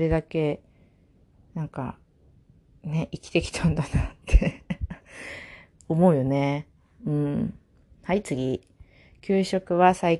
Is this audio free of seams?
yes; 0 cuts

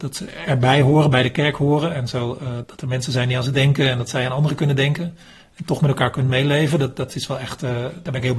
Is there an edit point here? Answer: yes; 1 cut; at 2.6 s

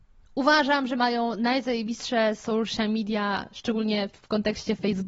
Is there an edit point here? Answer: no; 0 cuts

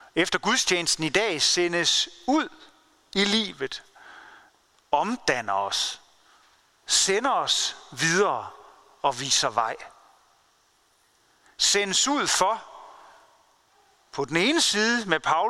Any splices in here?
yes; 2 cuts; at 4.7 s, 11.5 s

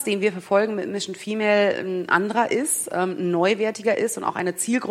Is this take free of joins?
yes; 0 cuts

